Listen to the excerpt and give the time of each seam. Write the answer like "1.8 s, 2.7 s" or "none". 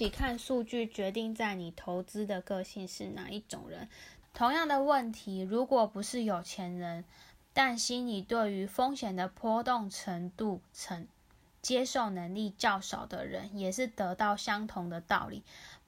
4.2 s